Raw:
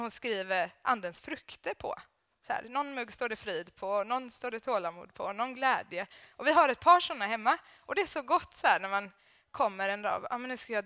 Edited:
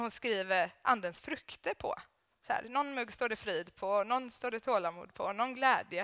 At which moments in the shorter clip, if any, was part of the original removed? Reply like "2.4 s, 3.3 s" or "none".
none